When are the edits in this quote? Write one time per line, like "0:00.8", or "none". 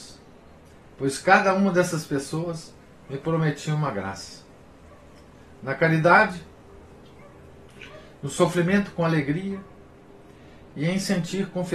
none

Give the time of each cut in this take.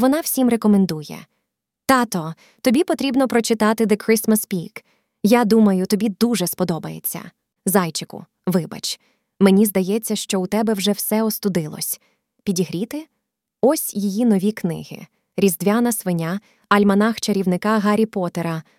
0:07.6
0:16.5

